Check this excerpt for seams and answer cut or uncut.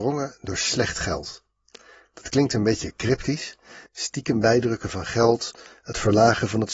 cut